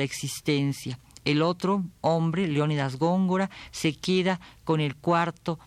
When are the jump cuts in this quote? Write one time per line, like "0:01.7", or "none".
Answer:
none